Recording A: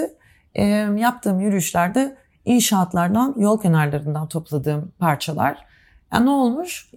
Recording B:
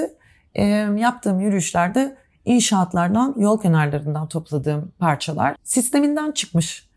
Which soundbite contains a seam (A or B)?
B